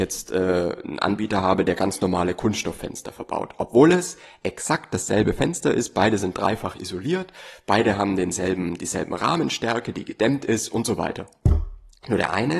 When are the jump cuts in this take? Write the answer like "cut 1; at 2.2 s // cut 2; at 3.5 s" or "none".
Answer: none